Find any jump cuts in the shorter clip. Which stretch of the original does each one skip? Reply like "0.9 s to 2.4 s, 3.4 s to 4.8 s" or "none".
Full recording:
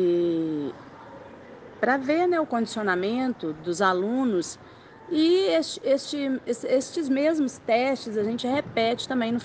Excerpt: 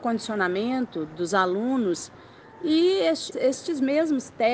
5.8 s to 6.6 s